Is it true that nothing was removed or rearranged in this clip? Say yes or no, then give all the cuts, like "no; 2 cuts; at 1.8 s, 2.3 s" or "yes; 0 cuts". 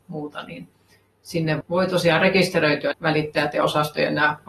no; 2 cuts; at 1.6 s, 2.9 s